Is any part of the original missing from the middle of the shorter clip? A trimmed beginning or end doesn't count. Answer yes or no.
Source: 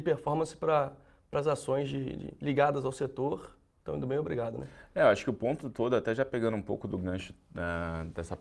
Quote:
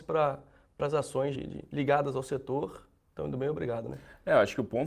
yes